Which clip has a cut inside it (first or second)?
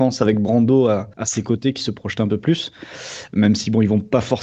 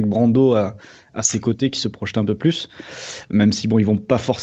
first